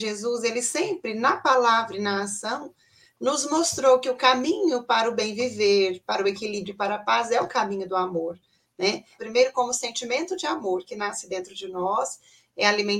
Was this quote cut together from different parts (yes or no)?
yes